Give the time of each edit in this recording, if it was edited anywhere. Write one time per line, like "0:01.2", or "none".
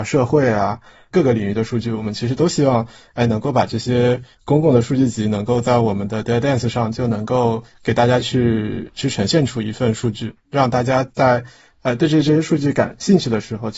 none